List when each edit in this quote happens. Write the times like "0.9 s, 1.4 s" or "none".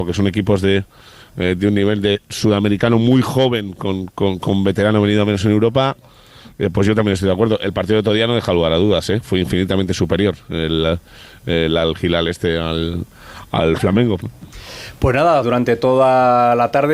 14.2 s, 15.4 s